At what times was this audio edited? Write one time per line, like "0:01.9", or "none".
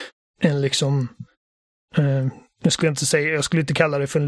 none

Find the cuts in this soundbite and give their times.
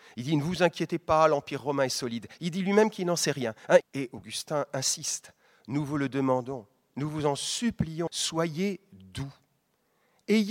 0:03.8
0:08.1

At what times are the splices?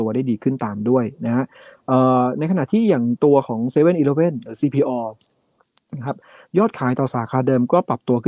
none

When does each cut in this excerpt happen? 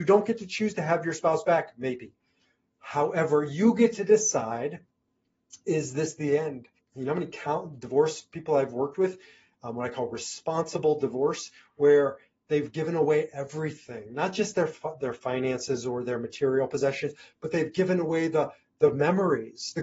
0:06.8

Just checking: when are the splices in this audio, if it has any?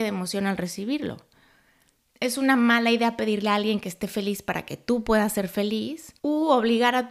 0:06.2

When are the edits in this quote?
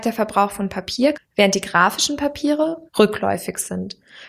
0:01.1
0:02.9

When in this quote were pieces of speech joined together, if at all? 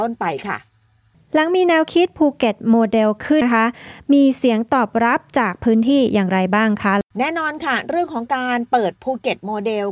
0:03.4
0:07.1

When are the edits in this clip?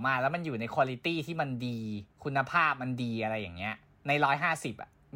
0:02.1

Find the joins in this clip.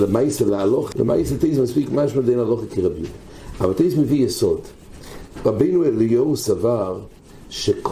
0:00.9

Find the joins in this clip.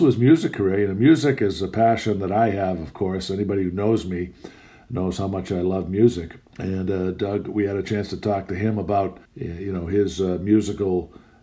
0:06.5
0:09.3

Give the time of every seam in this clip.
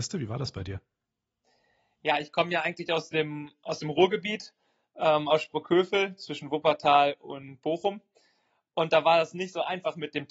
none

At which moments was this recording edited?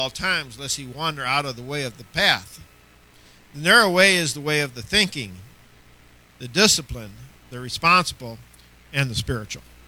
none

